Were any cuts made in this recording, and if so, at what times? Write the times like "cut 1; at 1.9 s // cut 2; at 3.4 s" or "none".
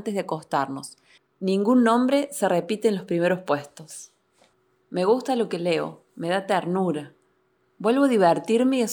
cut 1; at 1.2 s